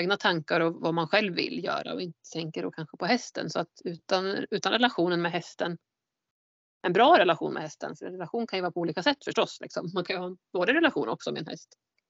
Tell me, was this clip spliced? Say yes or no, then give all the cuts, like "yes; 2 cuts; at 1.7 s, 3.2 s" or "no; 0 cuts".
no; 0 cuts